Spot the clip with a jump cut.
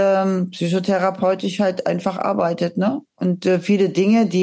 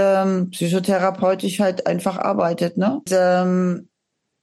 second; 1 cut; at 3.1 s

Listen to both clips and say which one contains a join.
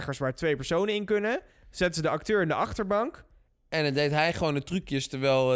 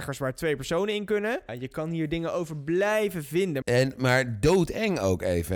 second; 2 cuts; at 1.5 s, 3.6 s

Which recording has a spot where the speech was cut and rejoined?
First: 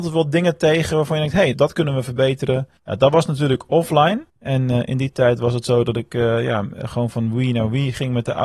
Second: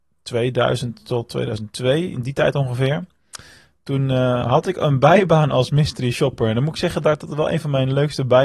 first; 3 cuts; at 1.5 s, 2.8 s, 4.3 s

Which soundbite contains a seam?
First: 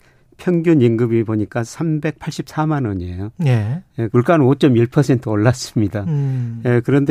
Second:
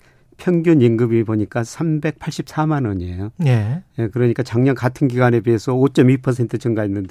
first; 1 cut; at 4.1 s

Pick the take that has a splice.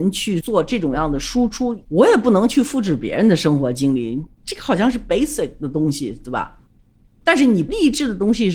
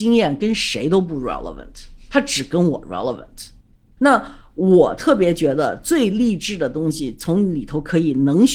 first; 1 cut; at 1.8 s

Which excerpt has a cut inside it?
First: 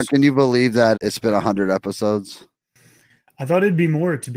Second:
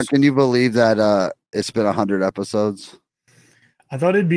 first; 1 cut; at 1.0 s

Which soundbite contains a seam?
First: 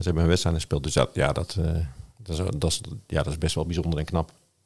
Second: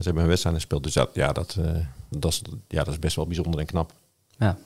second; 1 cut; at 2.1 s

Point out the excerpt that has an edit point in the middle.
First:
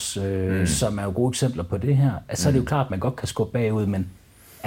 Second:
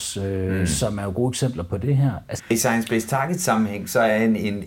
second; 1 cut; at 2.4 s

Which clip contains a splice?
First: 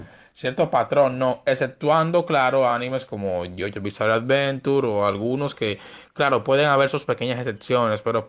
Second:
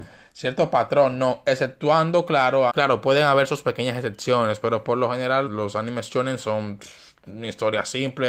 second; 2 cuts; at 2.7 s, 5.5 s

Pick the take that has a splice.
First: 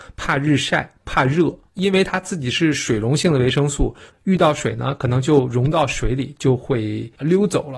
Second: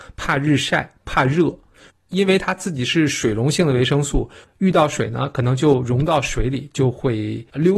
first; 1 cut; at 1.7 s

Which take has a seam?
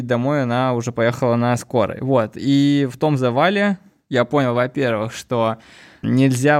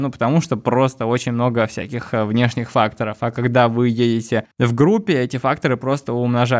second; 1 cut; at 4.5 s

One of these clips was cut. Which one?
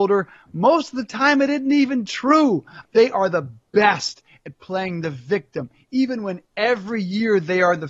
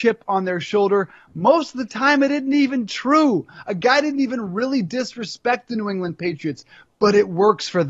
first; 1 cut; at 2.8 s

